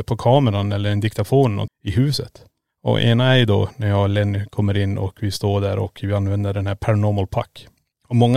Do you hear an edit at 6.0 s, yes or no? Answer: no